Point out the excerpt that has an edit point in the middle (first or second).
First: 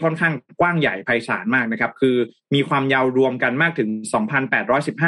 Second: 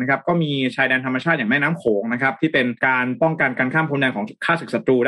second